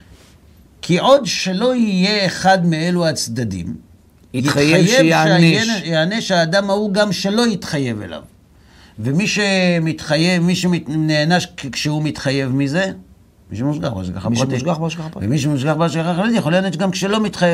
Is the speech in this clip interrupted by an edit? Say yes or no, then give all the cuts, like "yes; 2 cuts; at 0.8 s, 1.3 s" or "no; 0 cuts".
no; 0 cuts